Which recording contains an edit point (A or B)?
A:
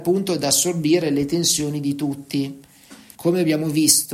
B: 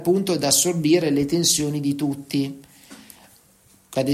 A